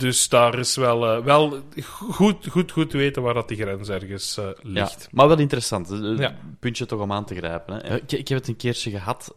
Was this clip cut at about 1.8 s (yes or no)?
no